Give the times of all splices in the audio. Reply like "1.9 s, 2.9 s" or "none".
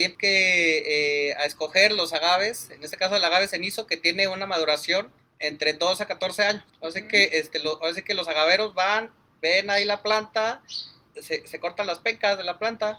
none